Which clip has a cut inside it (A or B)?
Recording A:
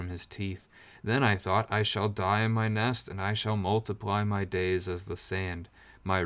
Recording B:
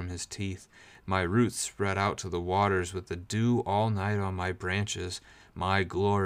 B